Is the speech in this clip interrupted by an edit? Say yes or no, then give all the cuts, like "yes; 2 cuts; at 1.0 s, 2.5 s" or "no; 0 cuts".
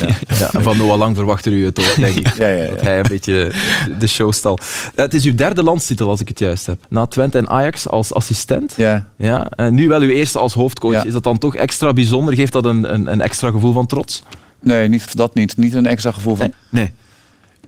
yes; 3 cuts; at 6.8 s, 15.1 s, 16.5 s